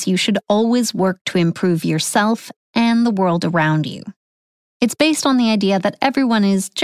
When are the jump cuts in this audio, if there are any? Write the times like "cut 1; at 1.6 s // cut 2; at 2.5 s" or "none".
cut 1; at 4.6 s